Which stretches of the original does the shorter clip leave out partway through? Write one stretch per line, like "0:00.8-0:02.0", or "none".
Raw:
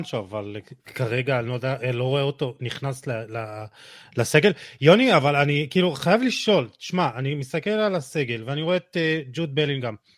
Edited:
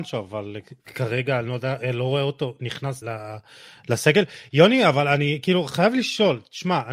0:03.0-0:03.3